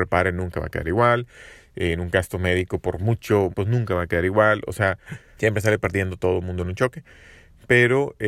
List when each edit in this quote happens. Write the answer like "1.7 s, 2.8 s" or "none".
3.5 s, 5.4 s